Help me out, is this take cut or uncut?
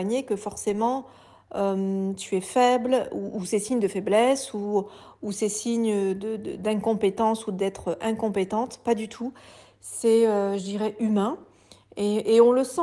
uncut